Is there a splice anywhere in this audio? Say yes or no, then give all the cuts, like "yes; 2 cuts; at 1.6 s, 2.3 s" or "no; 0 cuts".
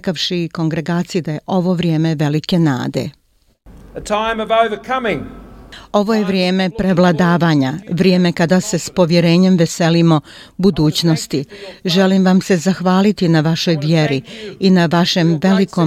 no; 0 cuts